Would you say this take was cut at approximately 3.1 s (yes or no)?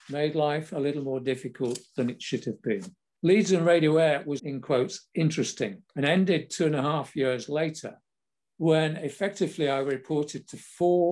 yes